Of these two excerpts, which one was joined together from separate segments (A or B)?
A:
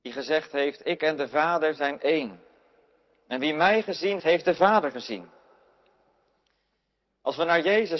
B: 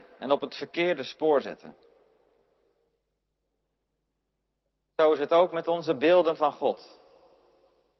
A